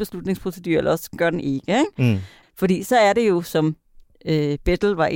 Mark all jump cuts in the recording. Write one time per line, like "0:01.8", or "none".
0:02.4

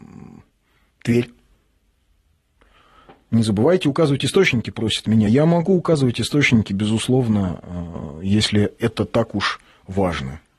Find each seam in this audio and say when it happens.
none

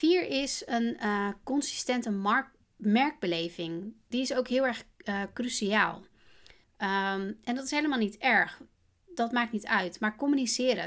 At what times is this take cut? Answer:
0:06.6

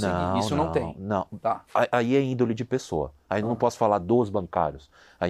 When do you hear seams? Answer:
none

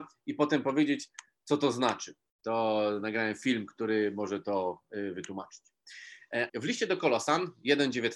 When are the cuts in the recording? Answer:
0:02.4
0:06.5

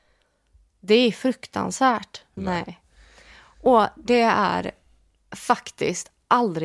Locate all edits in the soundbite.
0:02.4

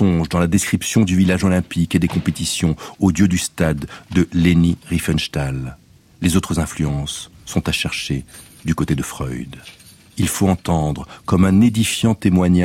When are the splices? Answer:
none

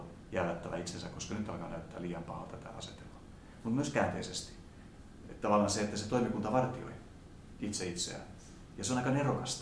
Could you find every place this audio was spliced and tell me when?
none

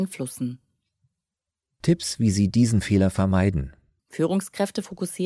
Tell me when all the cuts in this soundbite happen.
0:04.0

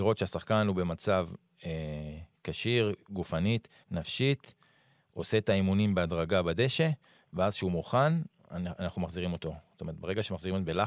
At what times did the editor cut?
none

